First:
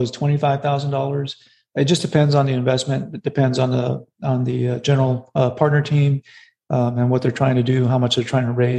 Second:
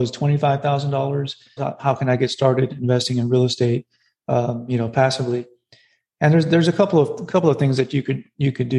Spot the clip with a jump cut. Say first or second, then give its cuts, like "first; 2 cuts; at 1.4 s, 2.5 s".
second; 1 cut; at 1.6 s